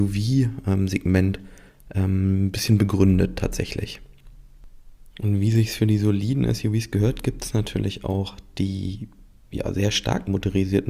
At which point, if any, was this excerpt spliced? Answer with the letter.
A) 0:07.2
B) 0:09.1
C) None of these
C